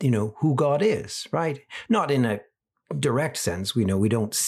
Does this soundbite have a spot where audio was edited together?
no; 0 cuts

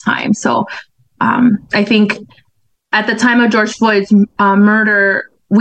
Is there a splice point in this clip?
no; 0 cuts

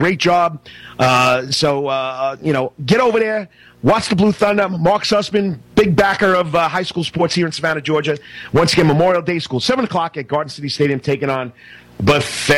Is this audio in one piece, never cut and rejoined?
yes; 0 cuts

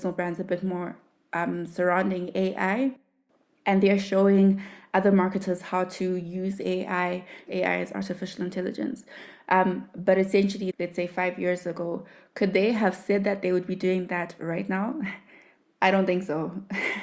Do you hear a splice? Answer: yes; 2 cuts; at 7.5 s, 10.7 s

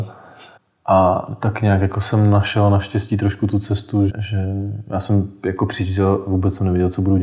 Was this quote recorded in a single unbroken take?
no; 1 cut; at 4.1 s

